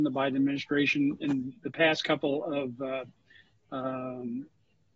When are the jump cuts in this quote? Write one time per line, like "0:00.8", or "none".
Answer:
none